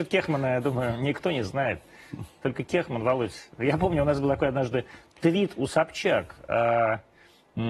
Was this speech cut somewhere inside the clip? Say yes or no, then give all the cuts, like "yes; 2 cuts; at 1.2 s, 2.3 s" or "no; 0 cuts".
no; 0 cuts